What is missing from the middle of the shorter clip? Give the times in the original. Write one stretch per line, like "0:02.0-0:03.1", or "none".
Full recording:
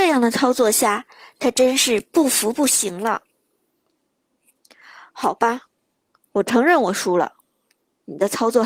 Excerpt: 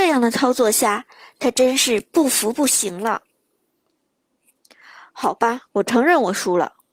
0:05.7-0:06.3